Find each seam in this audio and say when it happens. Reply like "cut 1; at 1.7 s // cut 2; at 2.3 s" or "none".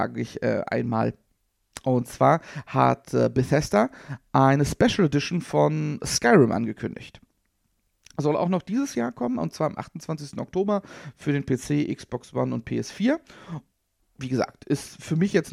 none